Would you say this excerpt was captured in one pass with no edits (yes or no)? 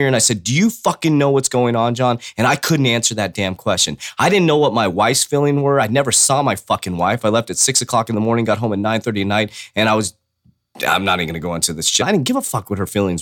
no